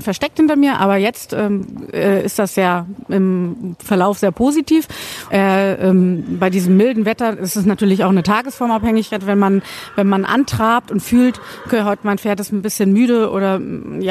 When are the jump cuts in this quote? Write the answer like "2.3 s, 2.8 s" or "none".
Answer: 5.3 s